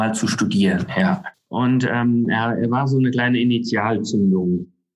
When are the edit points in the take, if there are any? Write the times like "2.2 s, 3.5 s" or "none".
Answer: 1.3 s